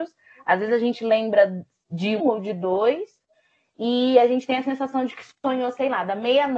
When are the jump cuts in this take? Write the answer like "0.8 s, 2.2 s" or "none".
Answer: 2.2 s